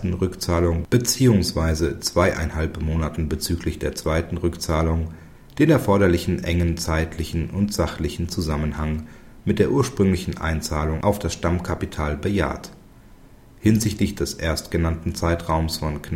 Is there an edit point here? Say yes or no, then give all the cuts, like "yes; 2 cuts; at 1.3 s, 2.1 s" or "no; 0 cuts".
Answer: no; 0 cuts